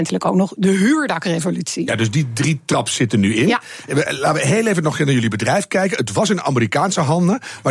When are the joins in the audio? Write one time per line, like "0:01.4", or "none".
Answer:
none